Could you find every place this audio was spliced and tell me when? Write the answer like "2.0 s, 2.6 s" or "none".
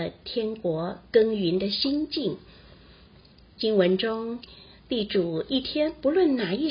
none